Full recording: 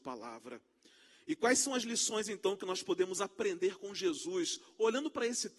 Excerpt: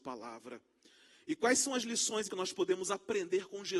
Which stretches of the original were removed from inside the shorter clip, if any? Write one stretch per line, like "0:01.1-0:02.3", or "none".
0:02.3-0:02.6

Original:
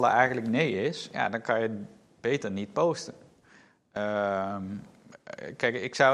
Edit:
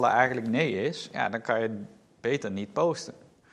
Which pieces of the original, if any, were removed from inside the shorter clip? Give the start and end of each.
none

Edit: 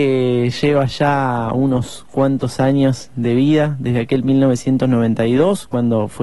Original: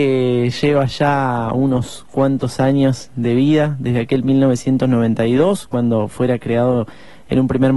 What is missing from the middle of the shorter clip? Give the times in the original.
none

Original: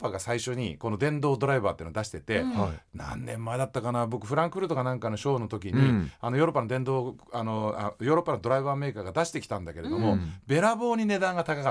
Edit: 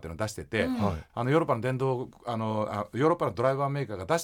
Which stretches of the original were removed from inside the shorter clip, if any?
0:02.9-0:06.2

